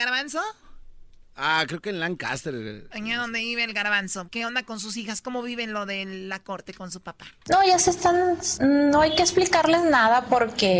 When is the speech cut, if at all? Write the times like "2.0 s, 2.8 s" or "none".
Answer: 4.2 s